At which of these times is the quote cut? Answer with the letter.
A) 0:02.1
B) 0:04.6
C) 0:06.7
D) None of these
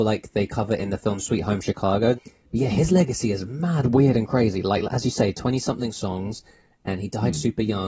A